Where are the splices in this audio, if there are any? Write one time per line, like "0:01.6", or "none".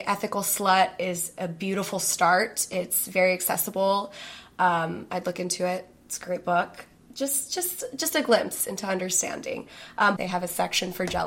0:10.2